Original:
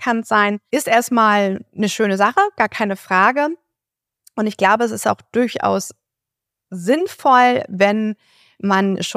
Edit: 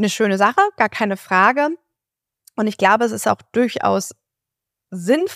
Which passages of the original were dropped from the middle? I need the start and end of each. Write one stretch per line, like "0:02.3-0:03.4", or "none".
none